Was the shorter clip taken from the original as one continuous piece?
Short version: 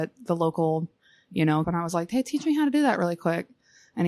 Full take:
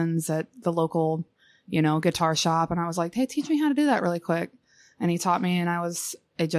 no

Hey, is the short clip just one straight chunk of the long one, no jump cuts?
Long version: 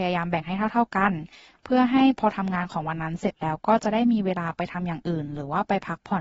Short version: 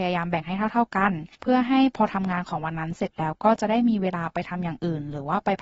no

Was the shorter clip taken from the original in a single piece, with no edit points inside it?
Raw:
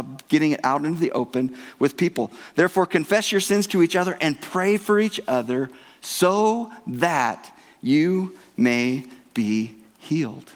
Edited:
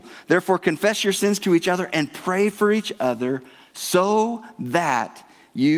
yes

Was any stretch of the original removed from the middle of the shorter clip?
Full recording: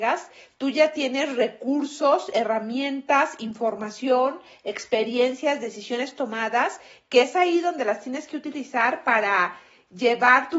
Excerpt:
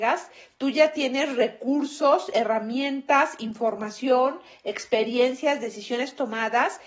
no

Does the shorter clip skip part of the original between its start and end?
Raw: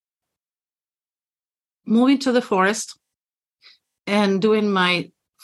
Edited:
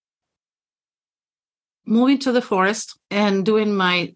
yes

